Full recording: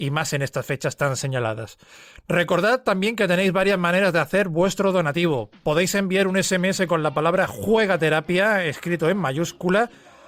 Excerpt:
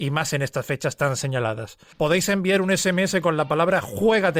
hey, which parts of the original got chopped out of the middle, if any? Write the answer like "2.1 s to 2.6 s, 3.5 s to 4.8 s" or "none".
1.9 s to 5.6 s